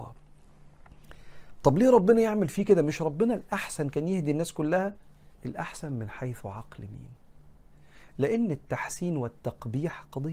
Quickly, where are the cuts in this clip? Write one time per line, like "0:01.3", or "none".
0:05.3